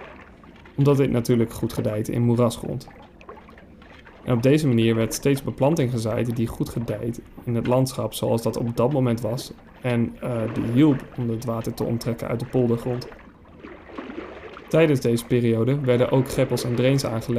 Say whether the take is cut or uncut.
cut